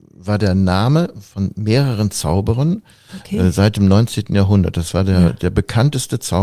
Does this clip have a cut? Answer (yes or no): no